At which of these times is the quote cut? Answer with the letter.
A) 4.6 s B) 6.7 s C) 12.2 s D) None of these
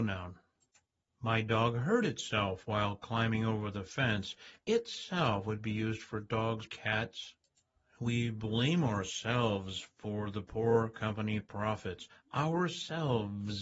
B